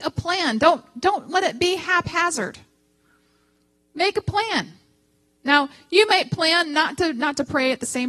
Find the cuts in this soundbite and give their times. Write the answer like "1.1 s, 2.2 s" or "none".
none